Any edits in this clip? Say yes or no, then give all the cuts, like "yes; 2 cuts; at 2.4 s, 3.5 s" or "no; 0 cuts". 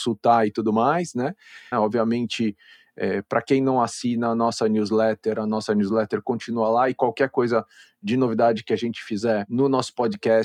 yes; 1 cut; at 1.7 s